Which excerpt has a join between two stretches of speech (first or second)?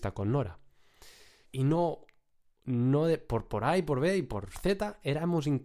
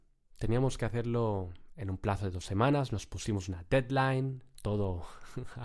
first